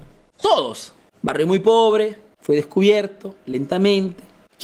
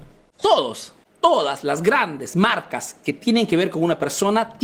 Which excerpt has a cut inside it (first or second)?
second